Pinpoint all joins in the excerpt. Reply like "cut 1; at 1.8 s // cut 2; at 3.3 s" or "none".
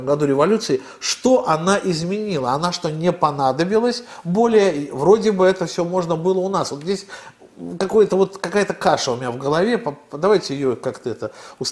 none